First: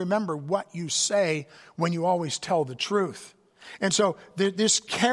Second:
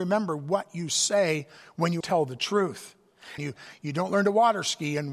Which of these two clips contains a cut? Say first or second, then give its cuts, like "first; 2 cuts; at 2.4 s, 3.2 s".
second; 2 cuts; at 2.0 s, 3.4 s